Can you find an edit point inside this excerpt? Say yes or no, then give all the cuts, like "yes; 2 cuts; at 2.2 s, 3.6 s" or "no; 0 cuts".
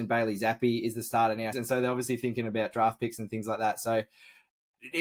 yes; 1 cut; at 1.5 s